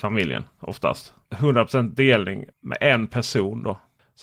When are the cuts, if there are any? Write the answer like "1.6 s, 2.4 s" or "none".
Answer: 1.3 s, 2.5 s